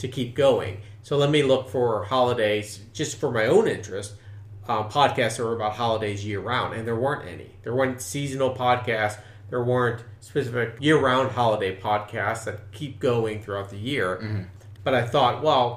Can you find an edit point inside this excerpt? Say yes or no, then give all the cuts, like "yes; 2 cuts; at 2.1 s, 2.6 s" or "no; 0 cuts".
yes; 1 cut; at 14.7 s